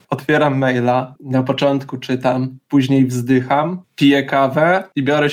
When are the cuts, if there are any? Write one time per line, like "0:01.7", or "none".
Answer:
none

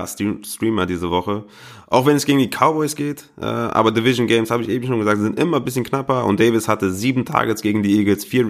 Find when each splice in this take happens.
none

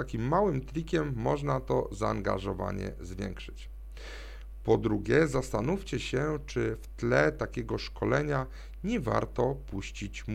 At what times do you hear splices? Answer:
none

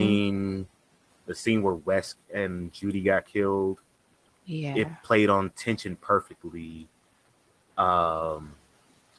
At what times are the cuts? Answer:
0:01.1

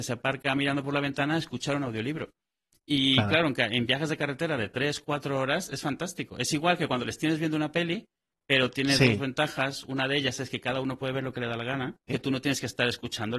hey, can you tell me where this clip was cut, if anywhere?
0:12.1

